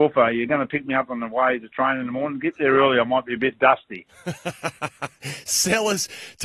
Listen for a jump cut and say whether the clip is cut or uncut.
uncut